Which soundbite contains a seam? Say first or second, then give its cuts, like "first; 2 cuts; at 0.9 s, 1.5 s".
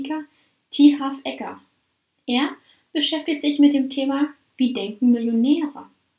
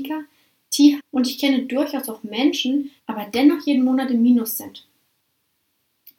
second; 2 cuts; at 1.0 s, 3.0 s